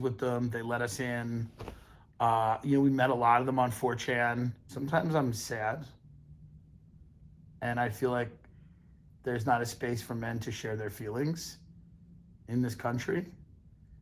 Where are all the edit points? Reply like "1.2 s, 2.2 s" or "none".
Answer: none